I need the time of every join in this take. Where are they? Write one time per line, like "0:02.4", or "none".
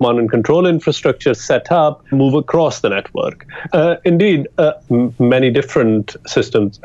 0:02.1
0:03.7
0:04.9

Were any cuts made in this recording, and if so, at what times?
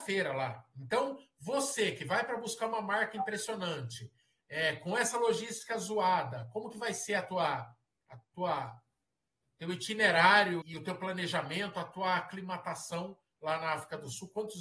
0:10.6

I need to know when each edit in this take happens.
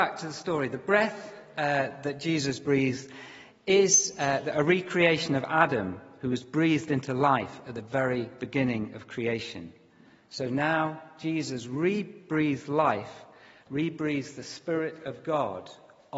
none

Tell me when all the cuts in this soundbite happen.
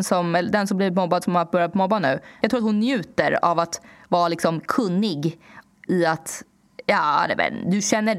0:02.4
0:05.9

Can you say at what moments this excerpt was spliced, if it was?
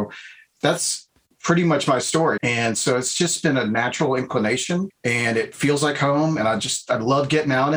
0:02.4

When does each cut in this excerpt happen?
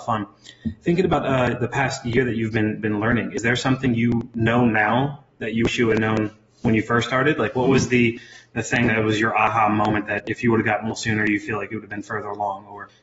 none

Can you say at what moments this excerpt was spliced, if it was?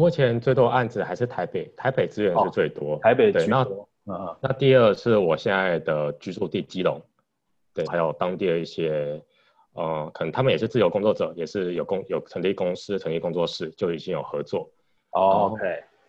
0:07.9

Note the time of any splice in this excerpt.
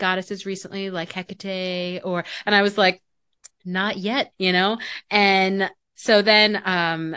0:04.3

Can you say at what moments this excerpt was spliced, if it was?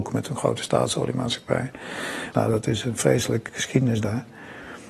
0:02.3
0:03.5

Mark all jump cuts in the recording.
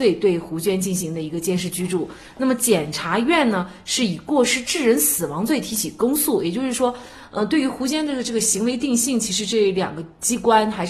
none

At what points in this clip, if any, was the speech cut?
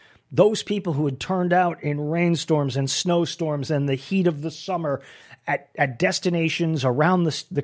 none

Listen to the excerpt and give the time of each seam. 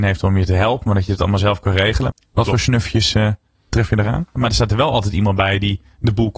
0:02.1
0:04.4

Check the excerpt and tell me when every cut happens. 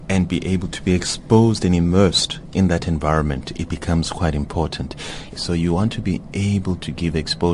0:05.4

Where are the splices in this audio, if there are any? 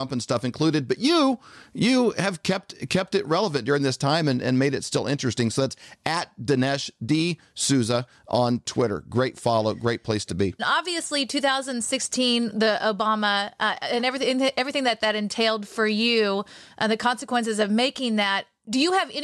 0:10.6

